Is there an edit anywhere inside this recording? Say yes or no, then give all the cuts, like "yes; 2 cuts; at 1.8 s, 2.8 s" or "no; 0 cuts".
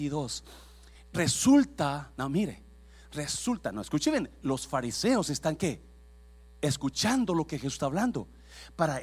no; 0 cuts